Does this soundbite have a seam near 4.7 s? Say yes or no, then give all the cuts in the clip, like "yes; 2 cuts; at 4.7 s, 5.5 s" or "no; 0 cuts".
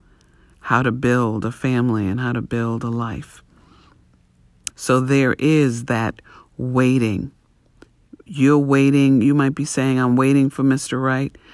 yes; 1 cut; at 4.7 s